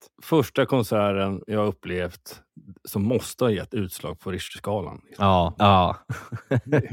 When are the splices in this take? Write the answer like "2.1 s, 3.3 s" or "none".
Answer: 5.6 s